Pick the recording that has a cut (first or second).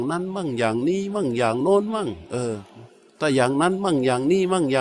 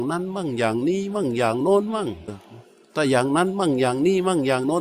second